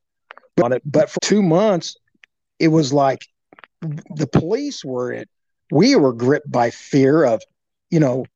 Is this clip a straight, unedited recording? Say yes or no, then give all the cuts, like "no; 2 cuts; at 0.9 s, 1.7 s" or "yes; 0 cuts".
no; 1 cut; at 1.2 s